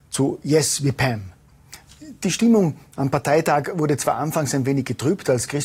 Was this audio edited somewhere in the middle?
no; 0 cuts

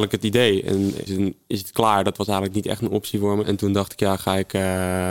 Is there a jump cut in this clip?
yes; 2 cuts; at 1.1 s, 3.4 s

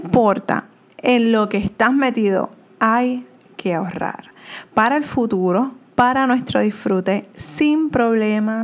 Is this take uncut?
yes; 0 cuts

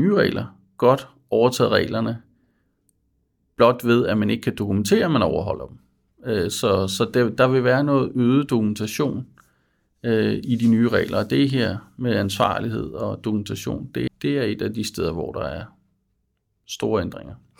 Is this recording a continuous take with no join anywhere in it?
no; 1 cut; at 14.1 s

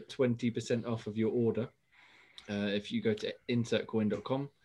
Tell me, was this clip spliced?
no; 0 cuts

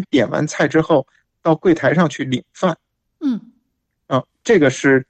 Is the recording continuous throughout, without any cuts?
yes; 0 cuts

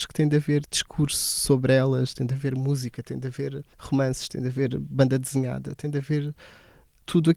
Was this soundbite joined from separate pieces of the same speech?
yes; 2 cuts; at 2.1 s, 3.7 s

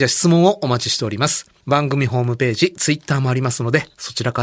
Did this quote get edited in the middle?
yes; 1 cut; at 1.6 s

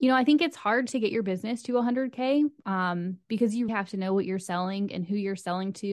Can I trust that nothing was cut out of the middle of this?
no; 1 cut; at 3.7 s

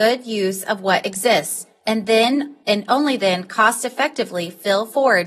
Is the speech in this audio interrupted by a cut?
no; 0 cuts

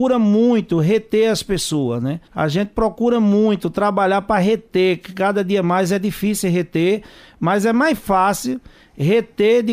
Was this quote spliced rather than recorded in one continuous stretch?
yes; 1 cut; at 2.3 s

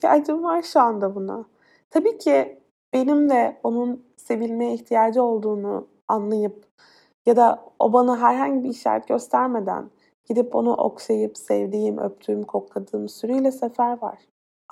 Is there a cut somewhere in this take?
no; 0 cuts

